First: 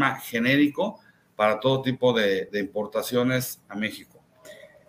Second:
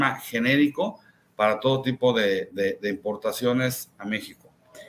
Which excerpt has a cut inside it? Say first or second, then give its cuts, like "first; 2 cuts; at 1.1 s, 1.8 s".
first; 1 cut; at 2.5 s